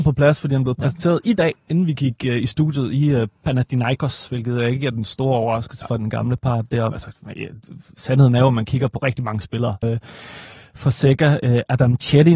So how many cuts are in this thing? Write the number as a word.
three